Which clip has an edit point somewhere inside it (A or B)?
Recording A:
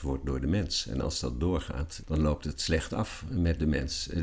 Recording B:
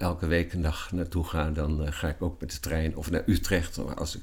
A